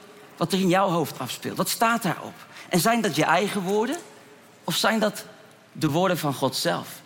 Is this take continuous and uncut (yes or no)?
yes